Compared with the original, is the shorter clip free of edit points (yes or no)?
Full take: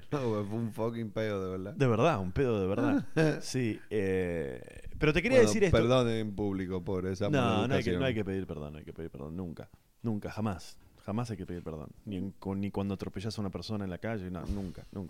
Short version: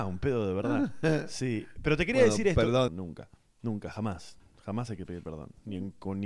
no